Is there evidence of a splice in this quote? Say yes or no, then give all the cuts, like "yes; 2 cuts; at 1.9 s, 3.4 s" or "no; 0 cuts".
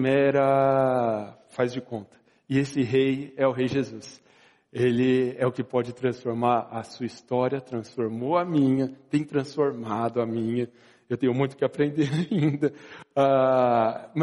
no; 0 cuts